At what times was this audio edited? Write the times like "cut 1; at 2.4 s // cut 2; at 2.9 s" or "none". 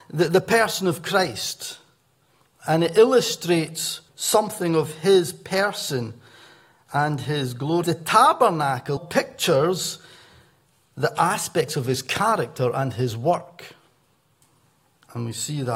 cut 1; at 4.1 s // cut 2; at 7.8 s // cut 3; at 9.0 s